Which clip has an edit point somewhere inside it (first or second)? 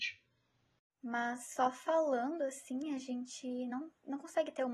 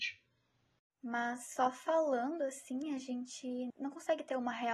second